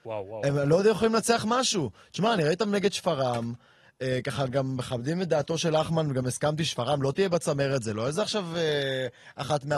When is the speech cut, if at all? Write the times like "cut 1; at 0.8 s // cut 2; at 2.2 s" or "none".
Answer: none